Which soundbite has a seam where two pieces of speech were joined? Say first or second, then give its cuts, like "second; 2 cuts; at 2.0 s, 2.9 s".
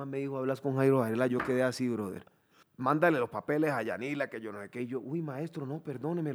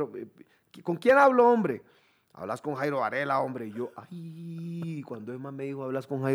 first; 1 cut; at 2.6 s